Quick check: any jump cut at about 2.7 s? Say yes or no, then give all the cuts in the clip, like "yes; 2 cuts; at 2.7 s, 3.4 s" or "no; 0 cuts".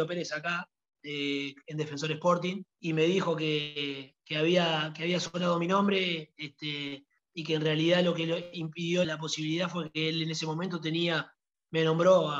yes; 2 cuts; at 2.7 s, 9.0 s